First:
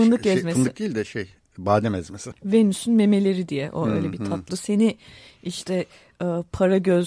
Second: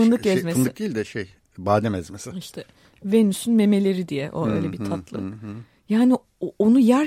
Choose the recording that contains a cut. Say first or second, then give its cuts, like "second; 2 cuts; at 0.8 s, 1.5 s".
first; 2 cuts; at 2.3 s, 4.5 s